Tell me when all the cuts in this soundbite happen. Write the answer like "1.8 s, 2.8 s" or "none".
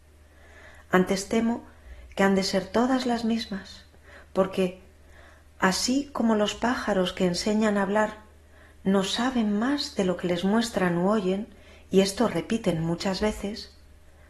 none